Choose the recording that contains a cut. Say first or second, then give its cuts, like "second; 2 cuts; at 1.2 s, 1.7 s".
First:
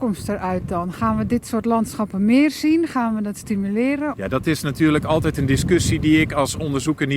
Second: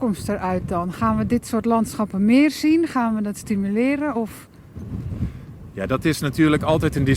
first; 1 cut; at 4.1 s